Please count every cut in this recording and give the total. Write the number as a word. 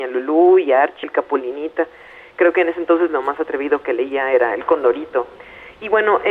one